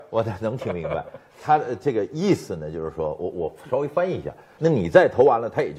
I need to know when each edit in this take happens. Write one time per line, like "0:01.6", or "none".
0:04.6